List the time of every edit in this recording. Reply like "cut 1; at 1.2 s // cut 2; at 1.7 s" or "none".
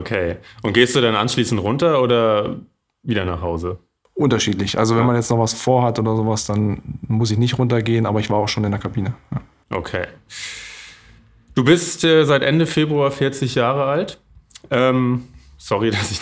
none